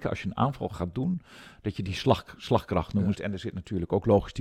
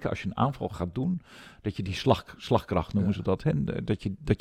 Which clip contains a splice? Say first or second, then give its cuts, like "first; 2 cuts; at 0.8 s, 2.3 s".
first; 1 cut; at 3.1 s